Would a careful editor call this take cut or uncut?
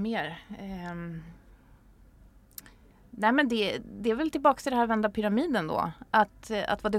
uncut